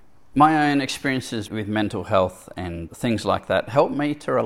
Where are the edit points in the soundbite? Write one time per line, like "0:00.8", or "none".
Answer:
0:01.5
0:02.9